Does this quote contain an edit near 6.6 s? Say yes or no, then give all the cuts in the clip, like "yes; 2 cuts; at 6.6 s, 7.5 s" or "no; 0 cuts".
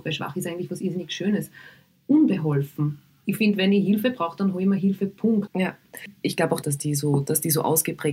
yes; 2 cuts; at 5.5 s, 6.6 s